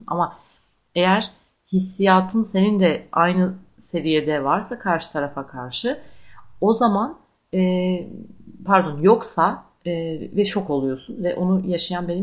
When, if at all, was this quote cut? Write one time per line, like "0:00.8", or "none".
0:09.8